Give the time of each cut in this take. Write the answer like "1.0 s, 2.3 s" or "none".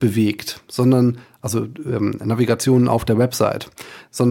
none